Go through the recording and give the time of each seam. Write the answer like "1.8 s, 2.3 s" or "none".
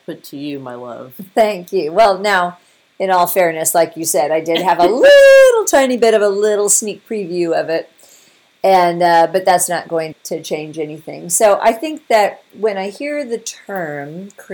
10.1 s